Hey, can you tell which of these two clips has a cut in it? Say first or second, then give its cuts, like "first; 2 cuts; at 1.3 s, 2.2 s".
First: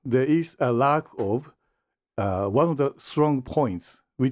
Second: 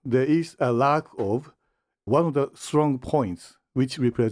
second; 1 cut; at 2.1 s